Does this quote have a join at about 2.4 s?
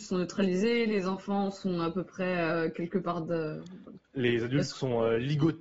no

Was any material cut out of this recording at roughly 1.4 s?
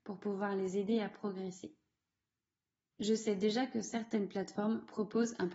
no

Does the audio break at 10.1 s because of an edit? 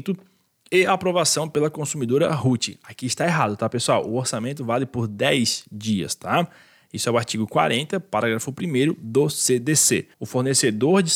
yes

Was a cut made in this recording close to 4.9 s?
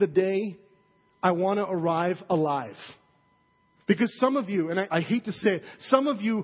yes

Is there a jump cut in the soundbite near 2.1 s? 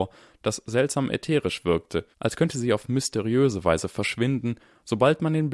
yes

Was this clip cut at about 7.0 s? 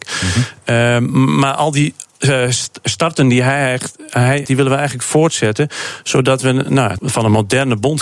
yes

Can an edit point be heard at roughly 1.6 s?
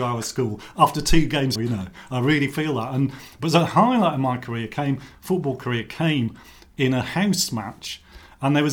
yes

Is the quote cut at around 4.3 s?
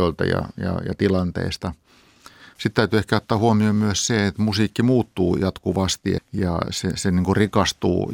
no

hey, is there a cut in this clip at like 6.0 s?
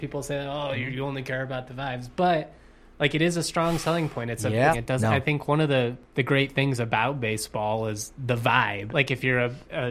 yes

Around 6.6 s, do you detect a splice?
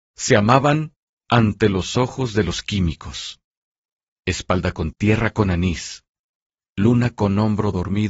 no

